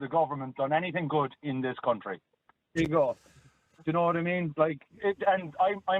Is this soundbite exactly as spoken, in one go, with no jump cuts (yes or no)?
no